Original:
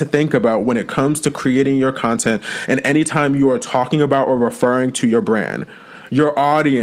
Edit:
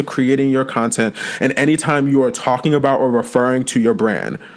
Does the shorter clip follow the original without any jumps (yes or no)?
yes